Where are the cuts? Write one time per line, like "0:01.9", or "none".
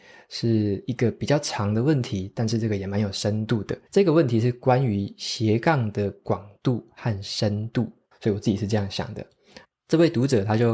0:03.9
0:08.1
0:09.6